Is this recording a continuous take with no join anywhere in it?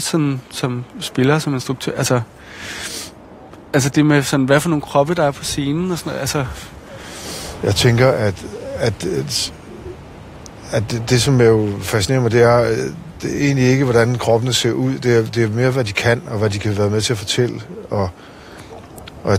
yes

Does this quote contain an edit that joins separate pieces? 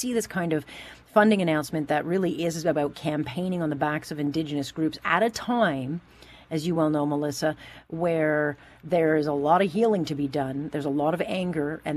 no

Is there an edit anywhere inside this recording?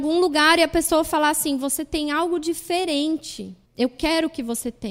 yes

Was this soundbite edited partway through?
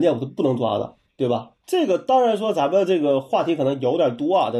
no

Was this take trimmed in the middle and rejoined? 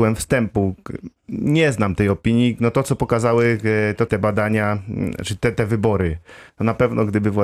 yes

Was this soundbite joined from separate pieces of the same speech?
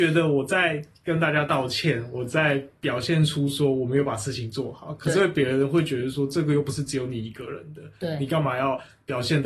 no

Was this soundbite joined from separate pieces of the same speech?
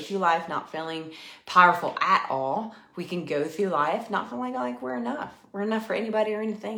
no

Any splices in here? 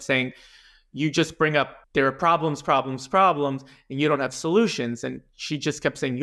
yes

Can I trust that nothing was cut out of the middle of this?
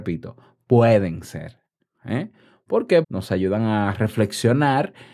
no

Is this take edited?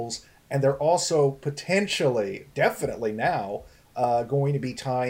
no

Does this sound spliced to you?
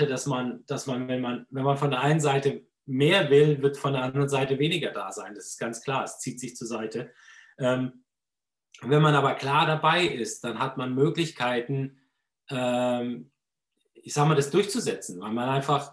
no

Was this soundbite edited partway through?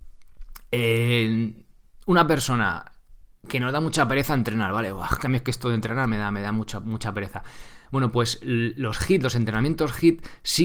no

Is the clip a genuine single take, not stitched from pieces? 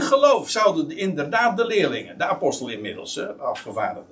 yes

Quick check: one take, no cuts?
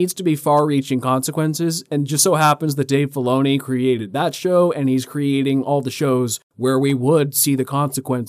yes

